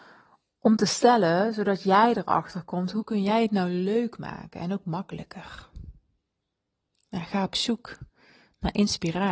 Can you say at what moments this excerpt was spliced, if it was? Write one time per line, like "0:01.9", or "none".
none